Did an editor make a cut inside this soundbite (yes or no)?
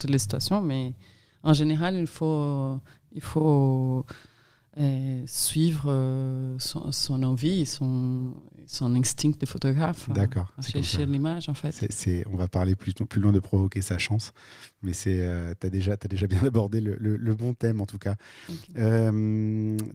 no